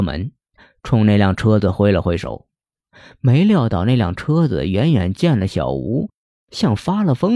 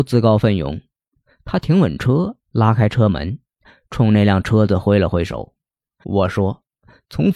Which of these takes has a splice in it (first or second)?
second